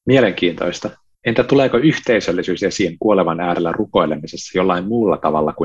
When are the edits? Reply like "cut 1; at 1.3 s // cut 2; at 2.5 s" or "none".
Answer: none